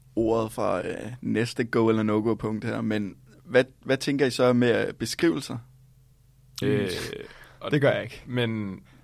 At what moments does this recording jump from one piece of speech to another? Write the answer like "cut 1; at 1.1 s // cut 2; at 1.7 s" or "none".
cut 1; at 6.6 s